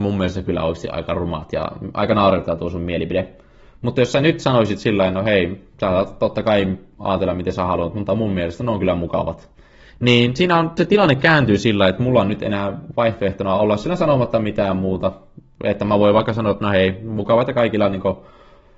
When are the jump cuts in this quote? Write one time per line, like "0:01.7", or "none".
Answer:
none